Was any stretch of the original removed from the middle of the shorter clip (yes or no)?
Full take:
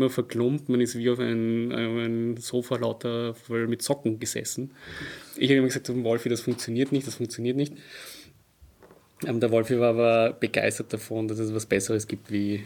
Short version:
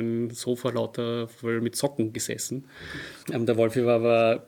yes